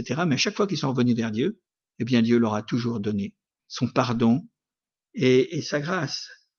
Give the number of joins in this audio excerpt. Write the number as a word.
one